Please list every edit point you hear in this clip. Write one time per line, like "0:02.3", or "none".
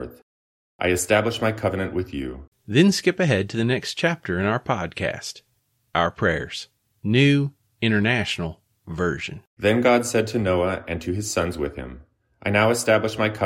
0:02.5
0:06.9
0:09.5